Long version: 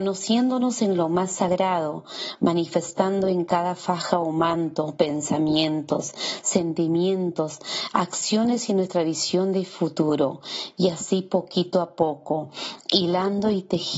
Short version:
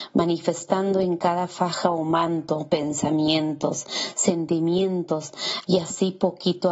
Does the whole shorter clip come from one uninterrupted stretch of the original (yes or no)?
no